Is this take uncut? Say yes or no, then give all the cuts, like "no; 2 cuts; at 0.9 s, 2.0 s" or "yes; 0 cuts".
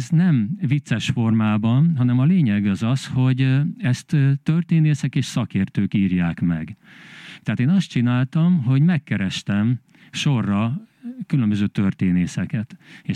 no; 1 cut; at 7.4 s